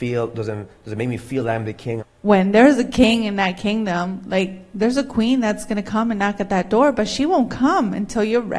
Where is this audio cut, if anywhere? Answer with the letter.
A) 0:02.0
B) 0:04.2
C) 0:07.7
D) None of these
A